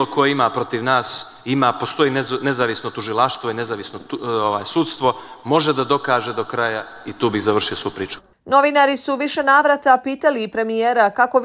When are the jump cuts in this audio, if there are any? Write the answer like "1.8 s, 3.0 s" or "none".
none